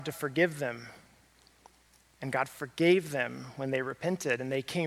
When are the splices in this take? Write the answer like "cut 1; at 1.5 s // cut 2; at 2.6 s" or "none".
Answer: none